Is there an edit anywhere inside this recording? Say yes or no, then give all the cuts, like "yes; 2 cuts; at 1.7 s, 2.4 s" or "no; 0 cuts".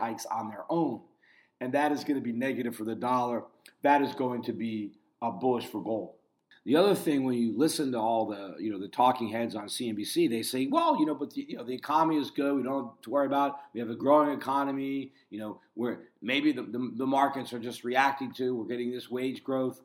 no; 0 cuts